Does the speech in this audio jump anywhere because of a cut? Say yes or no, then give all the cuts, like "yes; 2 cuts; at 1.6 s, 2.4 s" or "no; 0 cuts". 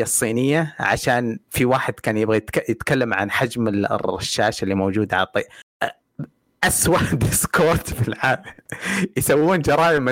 yes; 1 cut; at 1.4 s